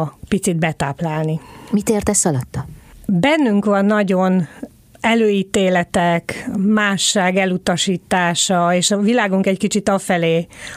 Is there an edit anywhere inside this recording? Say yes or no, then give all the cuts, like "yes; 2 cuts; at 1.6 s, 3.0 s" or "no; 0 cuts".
no; 0 cuts